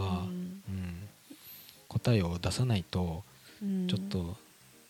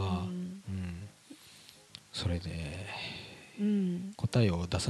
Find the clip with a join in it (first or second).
first